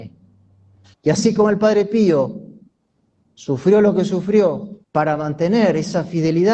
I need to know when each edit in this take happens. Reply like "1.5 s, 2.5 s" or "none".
0.9 s, 4.8 s